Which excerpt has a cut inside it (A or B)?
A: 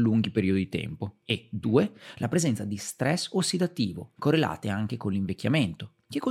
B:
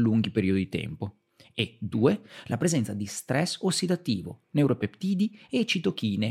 A